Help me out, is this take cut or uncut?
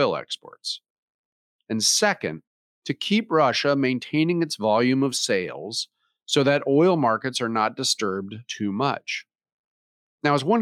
uncut